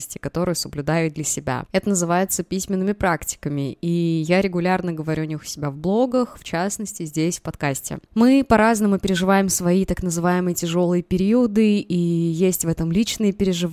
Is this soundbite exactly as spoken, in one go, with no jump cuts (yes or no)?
no